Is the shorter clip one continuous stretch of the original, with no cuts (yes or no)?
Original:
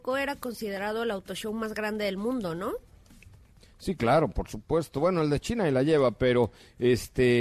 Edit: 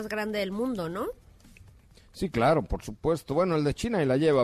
yes